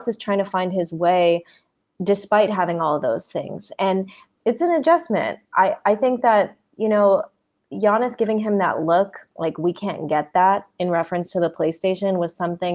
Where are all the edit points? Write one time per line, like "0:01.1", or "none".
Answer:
none

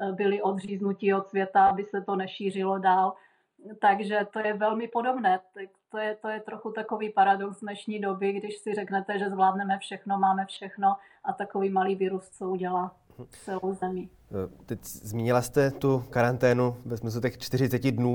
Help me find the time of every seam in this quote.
0:04.3

